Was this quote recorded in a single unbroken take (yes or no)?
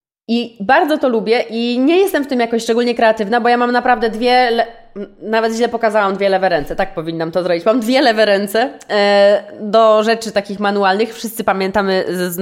yes